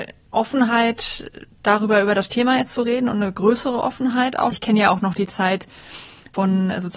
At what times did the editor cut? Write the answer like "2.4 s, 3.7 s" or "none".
4.5 s